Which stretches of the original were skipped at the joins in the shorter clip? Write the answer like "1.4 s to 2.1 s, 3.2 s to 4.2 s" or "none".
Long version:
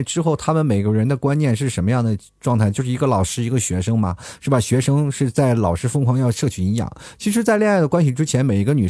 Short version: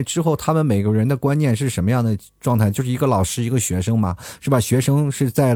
none

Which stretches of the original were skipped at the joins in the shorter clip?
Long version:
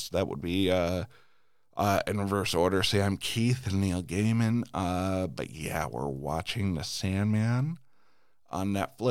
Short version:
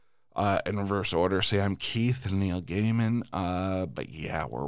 none

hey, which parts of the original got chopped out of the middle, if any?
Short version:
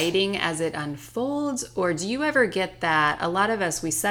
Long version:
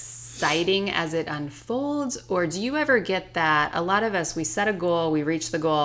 none

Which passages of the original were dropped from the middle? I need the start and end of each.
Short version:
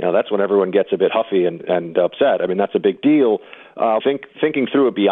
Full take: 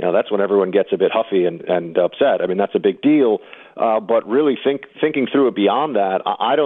4.0 s to 4.6 s

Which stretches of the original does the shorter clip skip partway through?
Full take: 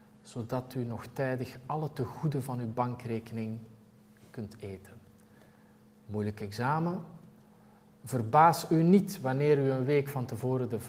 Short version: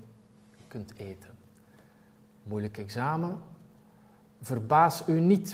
none

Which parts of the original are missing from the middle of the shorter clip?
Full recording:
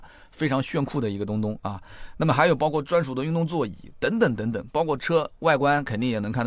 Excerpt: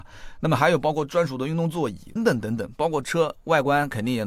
3.9 s to 4.1 s

